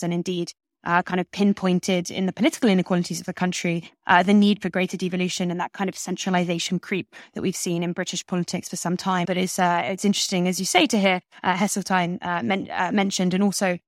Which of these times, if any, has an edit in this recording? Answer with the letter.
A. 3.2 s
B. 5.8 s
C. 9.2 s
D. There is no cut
C